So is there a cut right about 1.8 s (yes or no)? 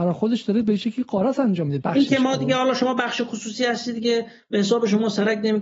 yes